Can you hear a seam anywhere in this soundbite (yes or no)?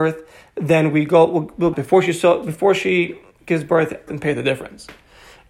yes